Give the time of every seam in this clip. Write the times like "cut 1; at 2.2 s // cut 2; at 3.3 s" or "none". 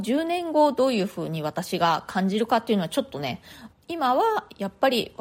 cut 1; at 3.7 s